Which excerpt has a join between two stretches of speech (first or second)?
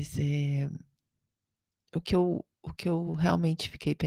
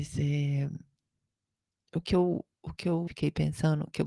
second